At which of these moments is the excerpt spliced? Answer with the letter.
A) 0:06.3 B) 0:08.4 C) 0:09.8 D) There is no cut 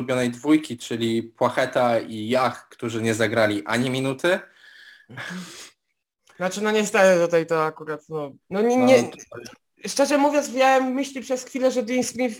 B